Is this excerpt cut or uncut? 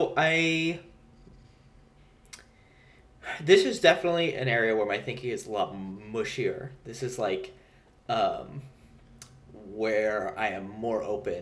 uncut